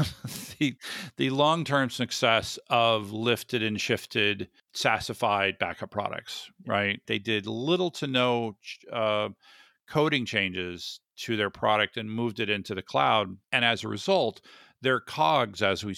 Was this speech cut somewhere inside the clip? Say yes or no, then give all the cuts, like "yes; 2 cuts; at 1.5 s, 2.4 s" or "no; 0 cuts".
yes; 1 cut; at 7.1 s